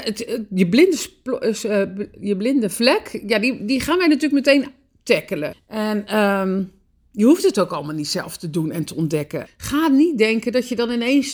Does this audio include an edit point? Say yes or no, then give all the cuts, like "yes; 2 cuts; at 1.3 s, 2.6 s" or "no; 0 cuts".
yes; 2 cuts; at 5.5 s, 9.5 s